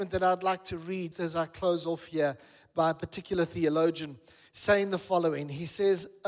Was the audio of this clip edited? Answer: yes; 1 cut; at 1.1 s

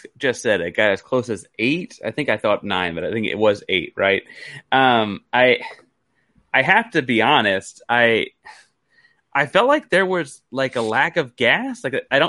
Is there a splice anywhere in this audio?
no; 0 cuts

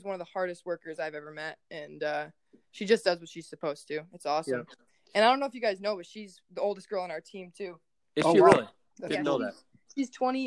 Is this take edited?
no; 0 cuts

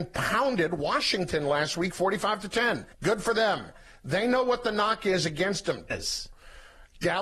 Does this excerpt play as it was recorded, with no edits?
no; 2 cuts; at 2.9 s, 5.9 s

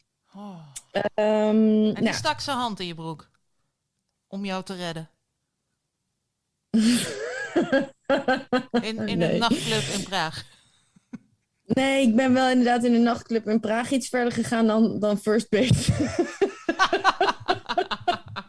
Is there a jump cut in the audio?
no; 0 cuts

